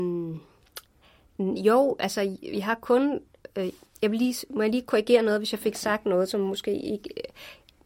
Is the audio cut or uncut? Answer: uncut